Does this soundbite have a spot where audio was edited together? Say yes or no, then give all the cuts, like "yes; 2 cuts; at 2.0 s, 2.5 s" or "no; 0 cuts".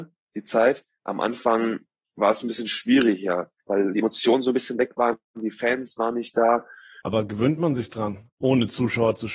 yes; 2 cuts; at 3.6 s, 7.0 s